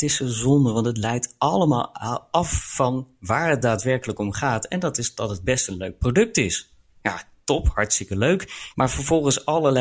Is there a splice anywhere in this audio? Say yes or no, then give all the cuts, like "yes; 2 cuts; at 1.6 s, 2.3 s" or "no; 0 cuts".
yes; 2 cuts; at 7.0 s, 8.7 s